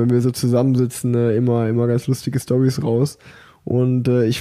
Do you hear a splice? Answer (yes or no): no